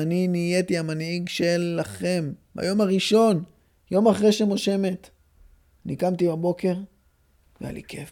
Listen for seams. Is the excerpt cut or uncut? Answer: uncut